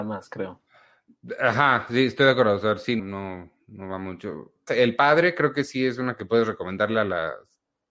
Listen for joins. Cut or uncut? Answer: cut